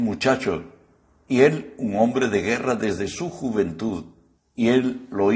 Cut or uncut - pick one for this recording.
cut